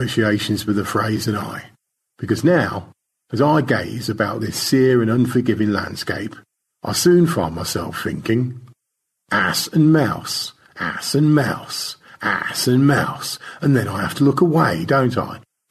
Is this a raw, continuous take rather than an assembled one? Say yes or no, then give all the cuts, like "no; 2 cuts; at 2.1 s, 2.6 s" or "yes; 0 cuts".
yes; 0 cuts